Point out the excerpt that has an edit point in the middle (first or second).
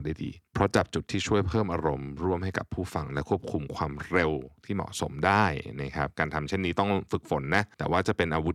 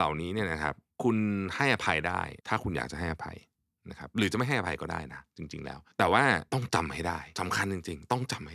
second